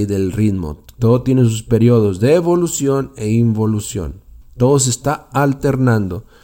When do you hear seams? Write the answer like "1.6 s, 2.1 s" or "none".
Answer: 4.4 s